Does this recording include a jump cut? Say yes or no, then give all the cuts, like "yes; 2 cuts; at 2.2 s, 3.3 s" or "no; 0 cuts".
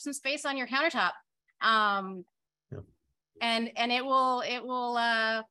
no; 0 cuts